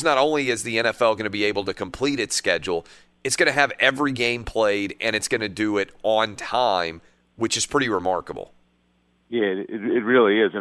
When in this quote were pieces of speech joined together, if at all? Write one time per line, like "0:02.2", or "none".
none